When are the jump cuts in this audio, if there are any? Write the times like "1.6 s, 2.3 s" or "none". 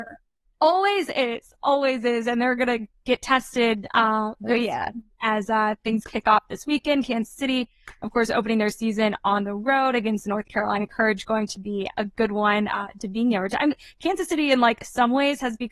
none

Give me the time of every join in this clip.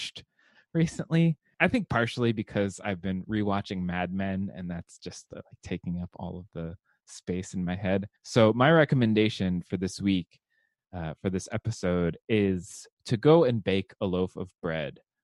1.5 s, 8.2 s

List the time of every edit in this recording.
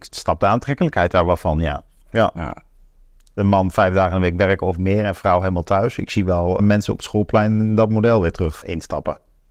6.6 s, 8.6 s

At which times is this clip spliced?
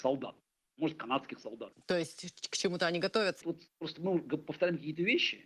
1.7 s, 3.4 s

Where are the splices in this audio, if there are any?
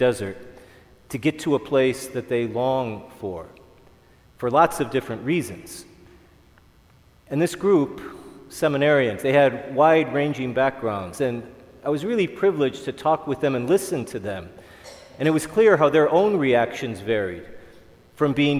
none

